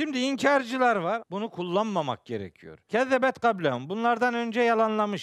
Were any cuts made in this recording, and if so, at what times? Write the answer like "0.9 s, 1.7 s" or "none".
1.2 s, 2.9 s